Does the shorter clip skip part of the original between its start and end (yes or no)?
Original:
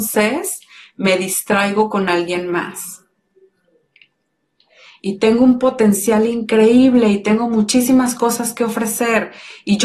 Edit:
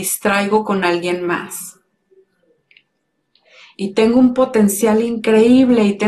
no